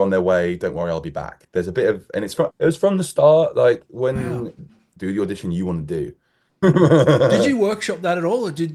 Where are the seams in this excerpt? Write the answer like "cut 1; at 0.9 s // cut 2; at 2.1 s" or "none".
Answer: cut 1; at 2.5 s // cut 2; at 4.9 s // cut 3; at 6.5 s